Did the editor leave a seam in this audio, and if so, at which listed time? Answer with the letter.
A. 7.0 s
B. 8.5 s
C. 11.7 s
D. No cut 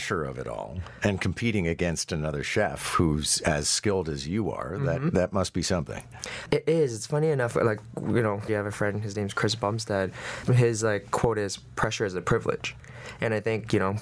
B